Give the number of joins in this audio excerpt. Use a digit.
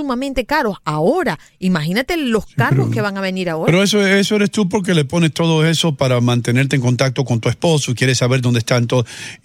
0